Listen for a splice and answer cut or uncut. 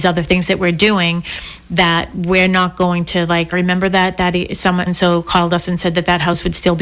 cut